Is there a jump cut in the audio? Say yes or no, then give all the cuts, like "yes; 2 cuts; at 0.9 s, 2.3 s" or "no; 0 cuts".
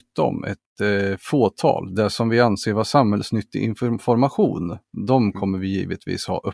no; 0 cuts